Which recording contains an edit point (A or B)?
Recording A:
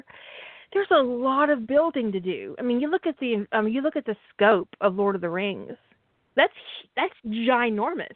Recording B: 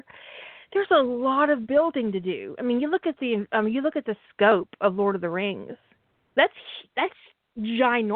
A